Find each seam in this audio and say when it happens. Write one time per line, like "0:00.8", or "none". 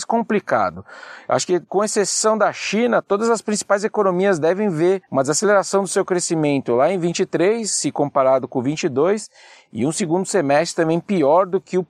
none